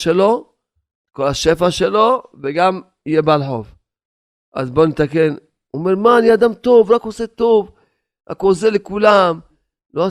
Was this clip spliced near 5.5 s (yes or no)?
no